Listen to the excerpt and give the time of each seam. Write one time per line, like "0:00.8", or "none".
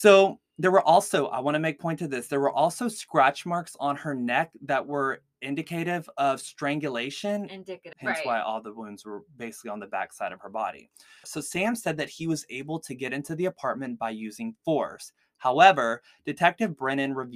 0:07.9
0:11.2